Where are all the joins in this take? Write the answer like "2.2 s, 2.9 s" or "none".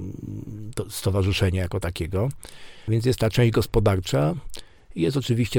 none